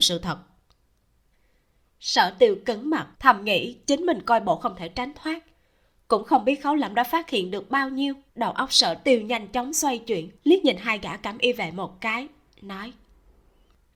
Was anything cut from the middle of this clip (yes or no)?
yes